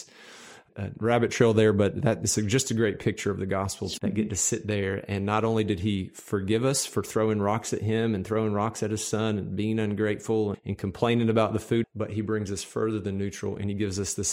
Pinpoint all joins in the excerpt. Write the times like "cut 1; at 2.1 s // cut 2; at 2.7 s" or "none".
cut 1; at 4.0 s // cut 2; at 10.5 s // cut 3; at 11.8 s